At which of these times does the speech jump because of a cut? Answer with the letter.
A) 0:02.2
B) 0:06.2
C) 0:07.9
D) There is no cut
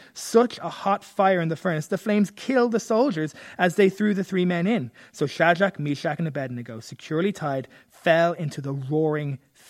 D